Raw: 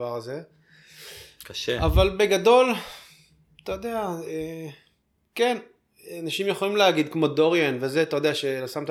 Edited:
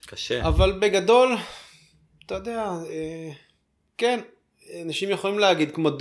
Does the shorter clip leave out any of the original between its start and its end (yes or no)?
no